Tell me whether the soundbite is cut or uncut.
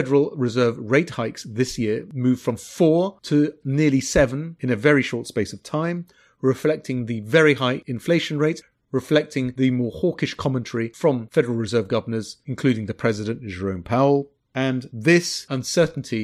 uncut